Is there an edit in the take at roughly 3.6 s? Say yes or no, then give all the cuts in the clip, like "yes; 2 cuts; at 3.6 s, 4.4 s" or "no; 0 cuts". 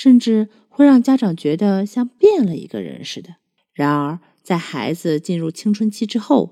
yes; 1 cut; at 3.6 s